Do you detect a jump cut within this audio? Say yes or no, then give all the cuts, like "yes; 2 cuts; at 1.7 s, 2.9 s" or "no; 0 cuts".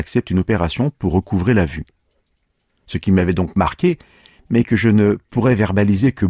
no; 0 cuts